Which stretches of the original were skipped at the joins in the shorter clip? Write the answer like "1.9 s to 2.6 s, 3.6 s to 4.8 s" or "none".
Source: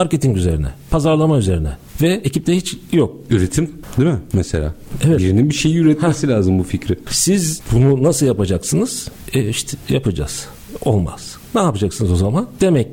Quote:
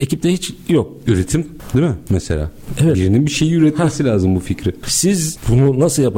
none

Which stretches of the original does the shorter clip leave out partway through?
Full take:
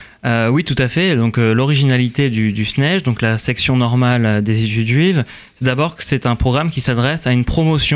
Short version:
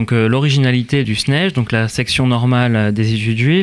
2.3 s to 2.5 s

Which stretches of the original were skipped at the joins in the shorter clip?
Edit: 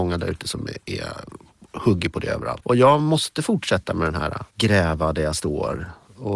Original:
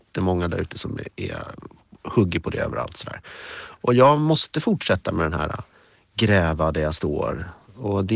2.9 s to 3.8 s, 5.7 s to 6.1 s

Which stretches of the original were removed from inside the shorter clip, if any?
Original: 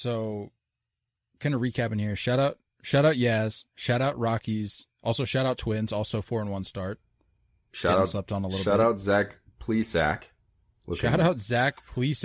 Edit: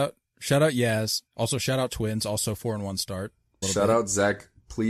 3.7 s to 4.9 s, 7.3 s to 8.5 s

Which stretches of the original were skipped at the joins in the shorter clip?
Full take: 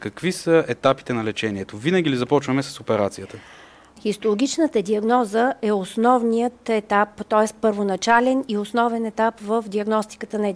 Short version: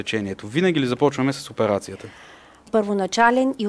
4.0 s to 7.6 s

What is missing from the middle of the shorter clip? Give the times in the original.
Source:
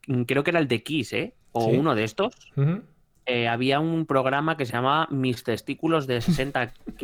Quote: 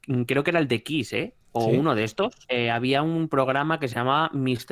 2.4 s to 3.2 s

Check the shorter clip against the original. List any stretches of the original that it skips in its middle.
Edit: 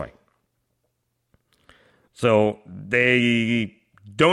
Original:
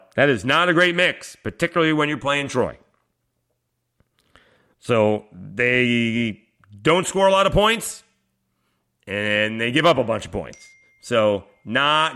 none

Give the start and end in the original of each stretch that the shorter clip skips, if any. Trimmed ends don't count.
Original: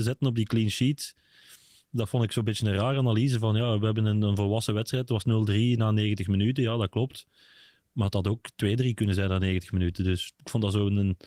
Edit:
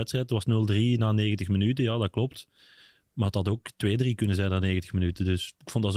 none

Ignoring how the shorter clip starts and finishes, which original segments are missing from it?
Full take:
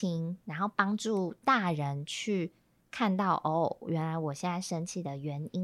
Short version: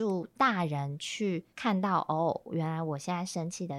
2.6 s to 2.9 s

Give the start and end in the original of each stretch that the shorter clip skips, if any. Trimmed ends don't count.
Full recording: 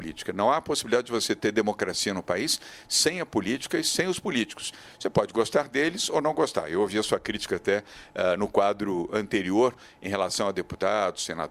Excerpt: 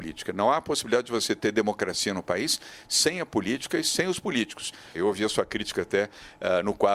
4.9 s to 6.7 s

